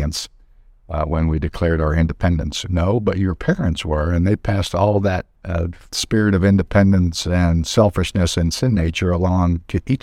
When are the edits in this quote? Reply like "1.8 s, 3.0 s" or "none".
2.7 s, 5.3 s